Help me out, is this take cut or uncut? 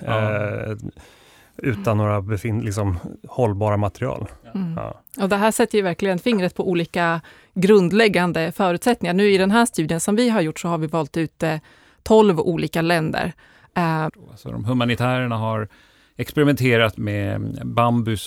cut